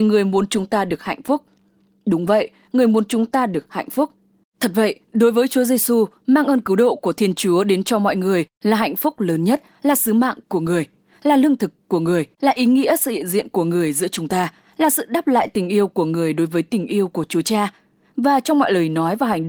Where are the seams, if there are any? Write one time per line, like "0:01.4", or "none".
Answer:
none